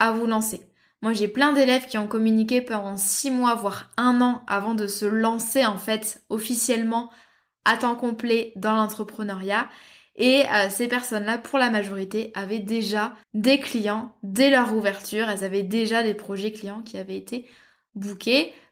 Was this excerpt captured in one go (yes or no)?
no